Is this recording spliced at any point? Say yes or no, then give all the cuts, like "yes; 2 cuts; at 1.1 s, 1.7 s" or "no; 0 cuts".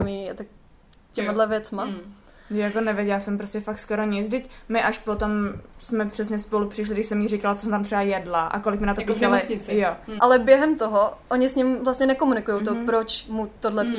yes; 1 cut; at 10.2 s